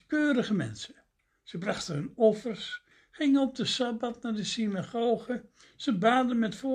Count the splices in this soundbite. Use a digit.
0